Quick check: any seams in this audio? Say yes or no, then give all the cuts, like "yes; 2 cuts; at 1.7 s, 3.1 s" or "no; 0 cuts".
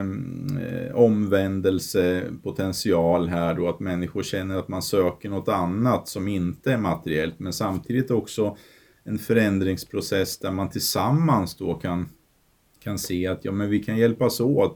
no; 0 cuts